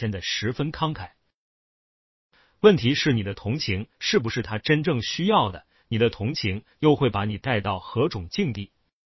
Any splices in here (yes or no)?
no